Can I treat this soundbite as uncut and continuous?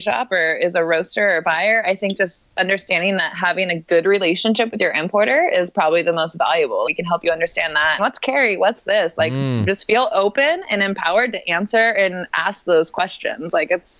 no; 2 cuts; at 6.8 s, 8.0 s

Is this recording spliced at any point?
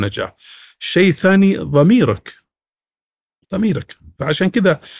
no; 0 cuts

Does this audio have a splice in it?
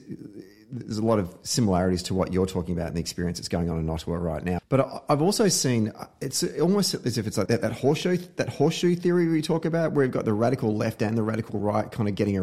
yes; 2 cuts; at 4.6 s, 7.5 s

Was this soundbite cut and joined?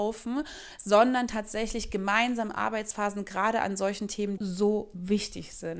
yes; 1 cut; at 4.4 s

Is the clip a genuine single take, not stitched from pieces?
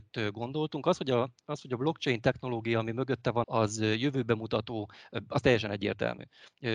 no; 1 cut; at 3.4 s

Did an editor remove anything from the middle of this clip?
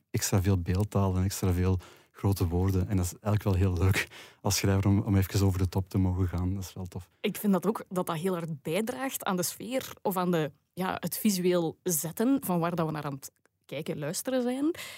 no; 0 cuts

